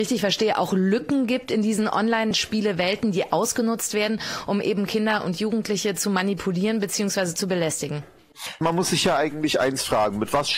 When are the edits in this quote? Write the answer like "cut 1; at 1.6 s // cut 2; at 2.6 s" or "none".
none